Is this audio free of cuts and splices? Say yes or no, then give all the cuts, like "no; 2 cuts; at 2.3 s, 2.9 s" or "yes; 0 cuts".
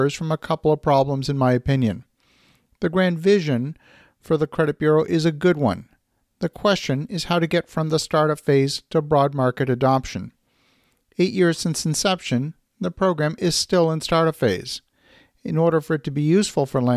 yes; 0 cuts